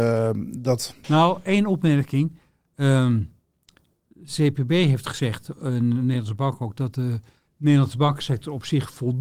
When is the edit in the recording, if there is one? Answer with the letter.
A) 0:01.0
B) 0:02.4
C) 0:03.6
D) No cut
A